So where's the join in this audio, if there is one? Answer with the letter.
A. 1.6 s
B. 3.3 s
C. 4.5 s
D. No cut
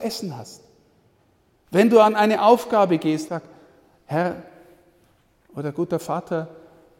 B